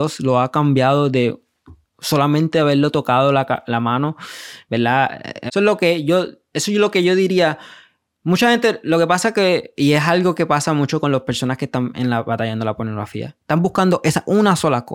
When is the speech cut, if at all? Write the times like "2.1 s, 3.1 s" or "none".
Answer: 5.5 s